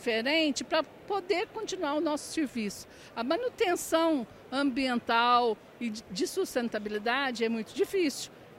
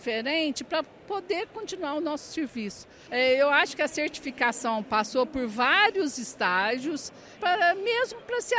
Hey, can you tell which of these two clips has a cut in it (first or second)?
second